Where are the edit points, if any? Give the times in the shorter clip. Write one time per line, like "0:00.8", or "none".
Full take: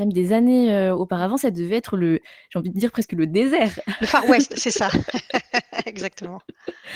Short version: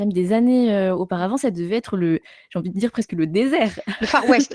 none